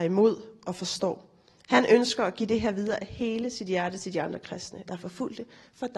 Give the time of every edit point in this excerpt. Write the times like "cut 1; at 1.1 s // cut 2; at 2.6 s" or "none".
cut 1; at 4.9 s